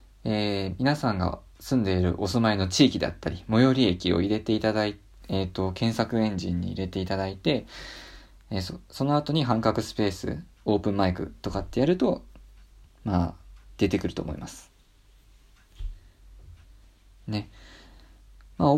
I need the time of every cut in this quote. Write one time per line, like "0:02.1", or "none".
none

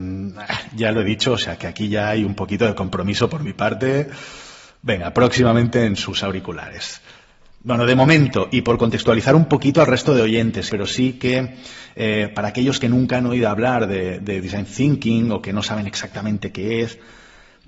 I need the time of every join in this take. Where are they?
0:10.7

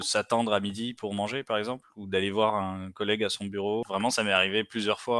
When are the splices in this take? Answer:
none

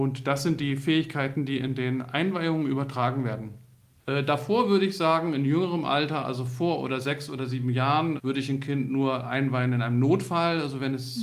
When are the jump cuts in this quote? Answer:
0:04.0
0:08.2

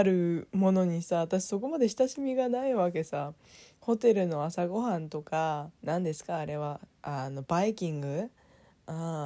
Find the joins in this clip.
0:05.8

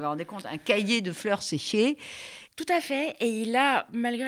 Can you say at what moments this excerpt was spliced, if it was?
0:02.5

